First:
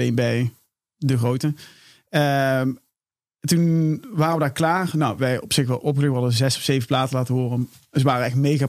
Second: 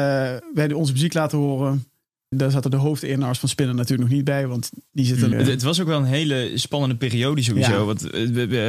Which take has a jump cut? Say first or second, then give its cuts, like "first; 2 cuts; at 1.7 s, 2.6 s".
second; 2 cuts; at 2.3 s, 5.3 s